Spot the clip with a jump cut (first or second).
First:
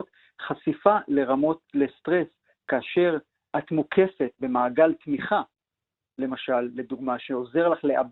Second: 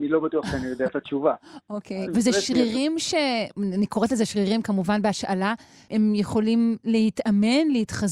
second